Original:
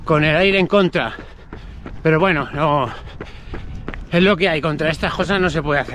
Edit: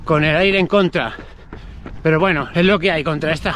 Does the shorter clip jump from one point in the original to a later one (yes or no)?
yes